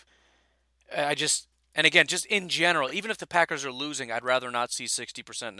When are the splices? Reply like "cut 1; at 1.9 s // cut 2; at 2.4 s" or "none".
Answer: none